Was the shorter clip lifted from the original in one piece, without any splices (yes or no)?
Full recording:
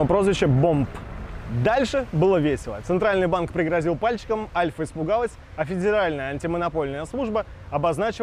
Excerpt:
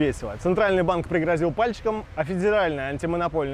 no